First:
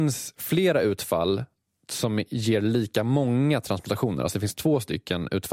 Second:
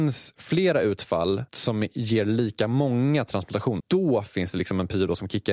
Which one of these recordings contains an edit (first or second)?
second